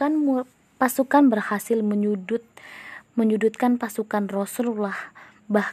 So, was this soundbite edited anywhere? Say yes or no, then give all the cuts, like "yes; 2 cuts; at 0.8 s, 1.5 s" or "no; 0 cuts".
no; 0 cuts